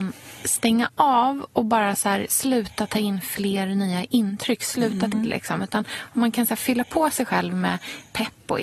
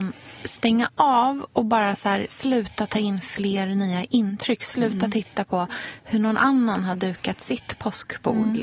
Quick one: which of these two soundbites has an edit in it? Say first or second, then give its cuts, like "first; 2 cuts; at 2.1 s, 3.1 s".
first; 1 cut; at 5.1 s